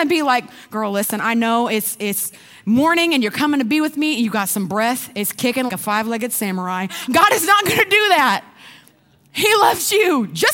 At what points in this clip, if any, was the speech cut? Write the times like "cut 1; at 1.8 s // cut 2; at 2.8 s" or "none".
cut 1; at 5.7 s // cut 2; at 7.1 s